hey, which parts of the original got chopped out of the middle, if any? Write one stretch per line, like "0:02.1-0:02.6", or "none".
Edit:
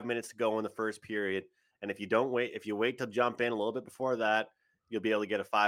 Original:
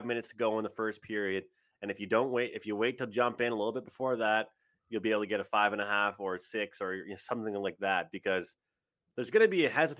none